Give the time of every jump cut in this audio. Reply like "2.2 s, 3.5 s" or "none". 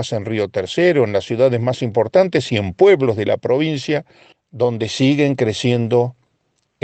4.3 s